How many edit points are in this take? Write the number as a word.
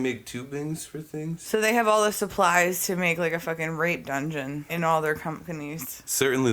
one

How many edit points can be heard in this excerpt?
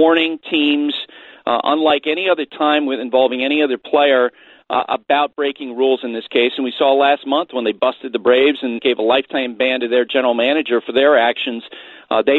one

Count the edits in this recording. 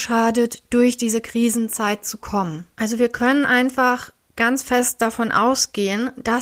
one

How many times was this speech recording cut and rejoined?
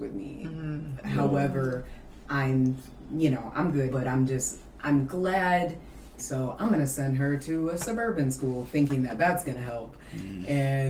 two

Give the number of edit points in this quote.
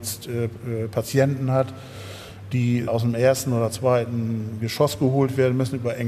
one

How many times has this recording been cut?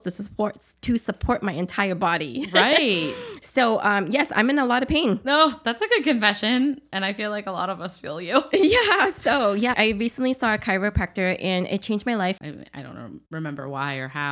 two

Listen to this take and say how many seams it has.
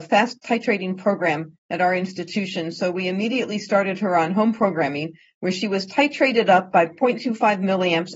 zero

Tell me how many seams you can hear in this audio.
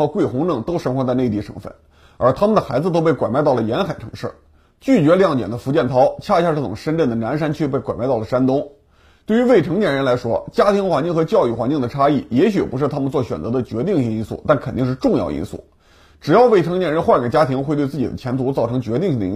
zero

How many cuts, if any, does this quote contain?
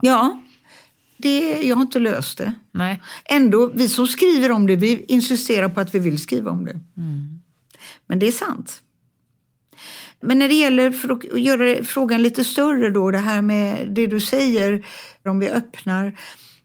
one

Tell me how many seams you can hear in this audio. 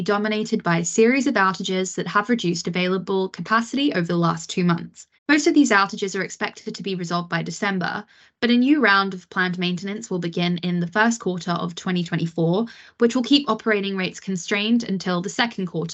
one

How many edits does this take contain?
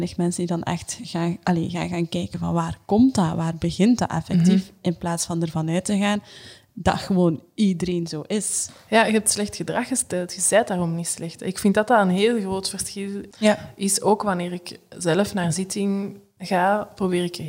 one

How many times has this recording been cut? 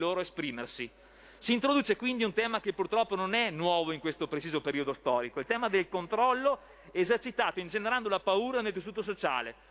zero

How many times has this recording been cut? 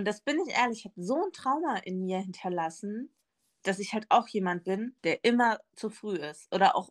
one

